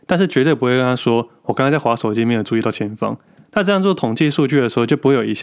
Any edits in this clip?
no; 0 cuts

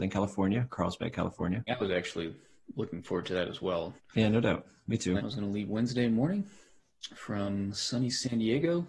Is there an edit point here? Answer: yes; 2 cuts; at 1.7 s, 5.2 s

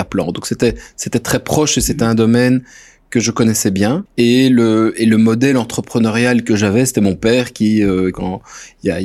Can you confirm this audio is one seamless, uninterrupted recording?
no; 2 cuts; at 4.1 s, 8.1 s

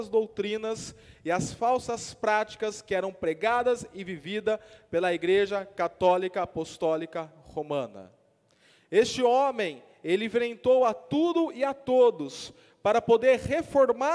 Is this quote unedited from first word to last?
yes; 0 cuts

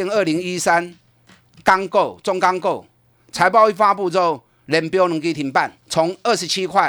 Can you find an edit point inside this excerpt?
yes; 1 cut; at 5.8 s

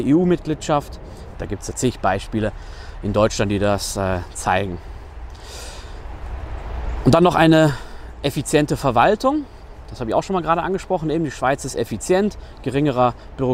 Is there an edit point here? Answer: yes; 1 cut; at 1.3 s

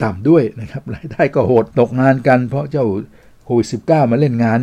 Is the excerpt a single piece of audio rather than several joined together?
no; 1 cut; at 1.7 s

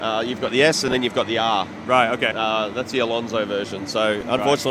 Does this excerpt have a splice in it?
yes; 1 cut; at 2.3 s

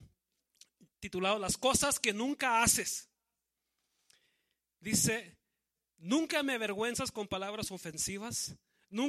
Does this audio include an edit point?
no; 0 cuts

